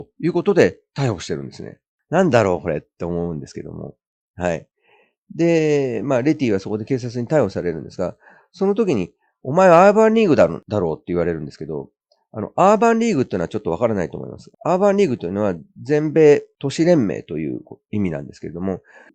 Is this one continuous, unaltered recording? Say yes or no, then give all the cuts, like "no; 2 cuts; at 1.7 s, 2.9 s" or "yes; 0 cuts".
yes; 0 cuts